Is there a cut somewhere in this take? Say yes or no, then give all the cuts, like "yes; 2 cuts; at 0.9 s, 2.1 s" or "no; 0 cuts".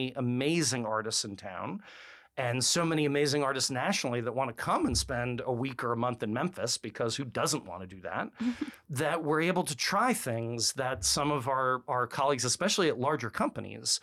no; 0 cuts